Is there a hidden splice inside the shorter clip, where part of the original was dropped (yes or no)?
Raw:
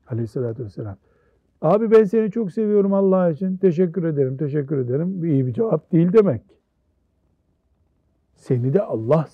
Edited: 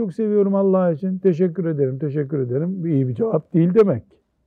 no